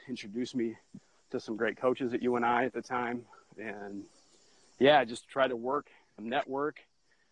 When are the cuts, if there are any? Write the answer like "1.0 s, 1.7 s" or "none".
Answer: 6.2 s